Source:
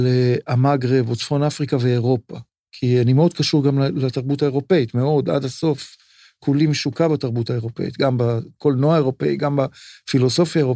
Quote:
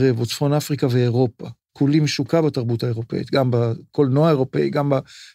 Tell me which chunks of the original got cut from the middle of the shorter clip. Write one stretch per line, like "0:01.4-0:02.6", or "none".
0:02.6-0:06.4